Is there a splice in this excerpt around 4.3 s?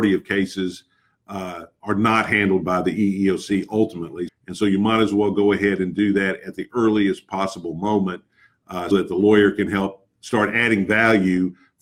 yes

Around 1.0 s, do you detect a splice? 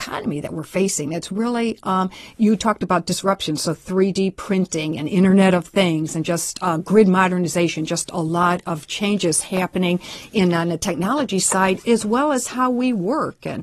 no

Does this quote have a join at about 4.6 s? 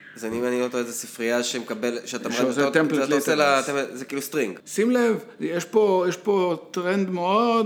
yes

